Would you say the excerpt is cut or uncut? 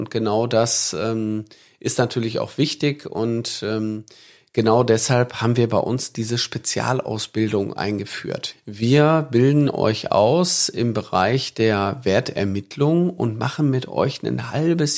cut